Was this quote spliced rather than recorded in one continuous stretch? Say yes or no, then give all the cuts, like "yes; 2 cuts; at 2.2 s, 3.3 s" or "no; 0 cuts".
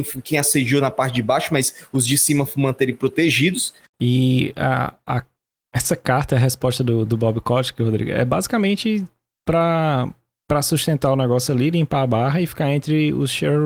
yes; 1 cut; at 3.9 s